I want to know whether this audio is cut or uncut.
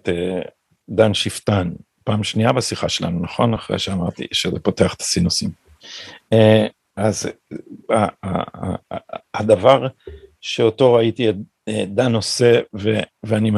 uncut